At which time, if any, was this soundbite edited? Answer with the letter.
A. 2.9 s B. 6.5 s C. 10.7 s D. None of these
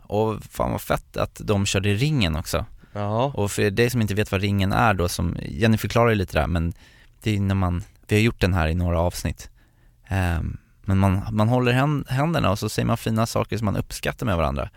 D